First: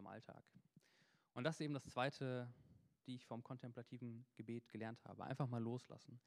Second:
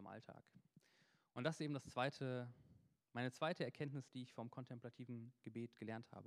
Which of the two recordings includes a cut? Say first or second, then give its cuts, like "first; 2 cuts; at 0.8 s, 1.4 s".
first; 1 cut; at 3.0 s